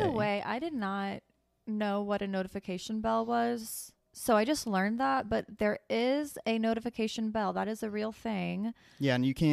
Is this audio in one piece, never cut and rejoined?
yes; 0 cuts

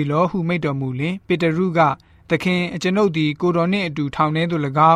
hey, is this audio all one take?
no; 1 cut; at 1.2 s

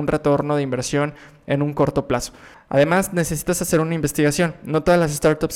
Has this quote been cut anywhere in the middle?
yes; 1 cut; at 2.5 s

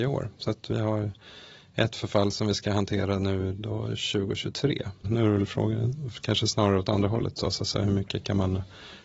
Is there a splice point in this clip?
yes; 1 cut; at 5.0 s

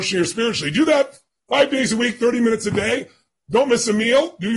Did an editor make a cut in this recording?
no; 0 cuts

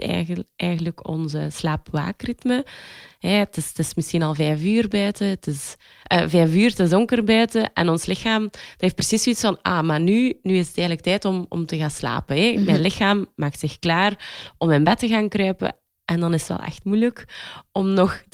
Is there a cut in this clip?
no; 0 cuts

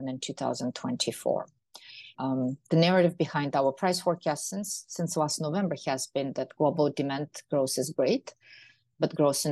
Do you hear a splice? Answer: yes; 1 cut; at 2.1 s

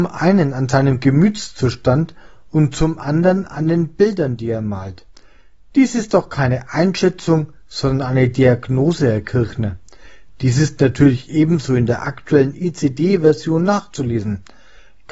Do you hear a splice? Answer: no; 0 cuts

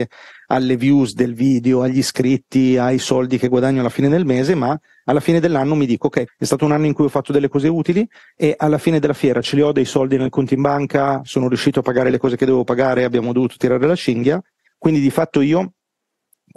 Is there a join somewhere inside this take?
yes; 2 cuts; at 6.3 s, 14.7 s

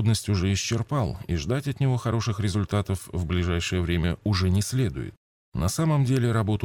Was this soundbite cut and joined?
no; 0 cuts

